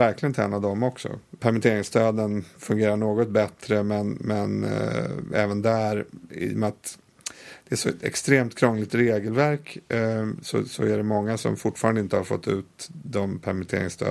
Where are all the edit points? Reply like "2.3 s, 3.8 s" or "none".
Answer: 1.4 s